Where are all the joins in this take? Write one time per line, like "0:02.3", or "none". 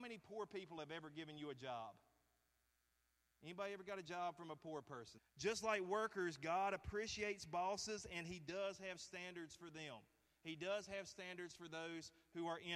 0:05.2

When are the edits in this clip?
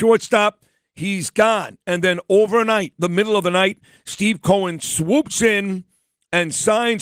none

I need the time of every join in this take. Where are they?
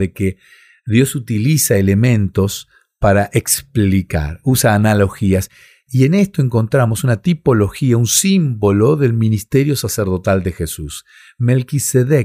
none

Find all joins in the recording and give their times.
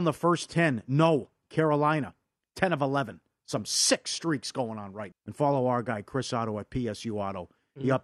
0:05.1

